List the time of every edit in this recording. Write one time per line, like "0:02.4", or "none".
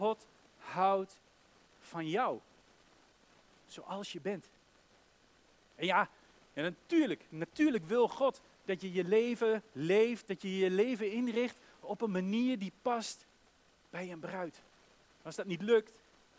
0:15.0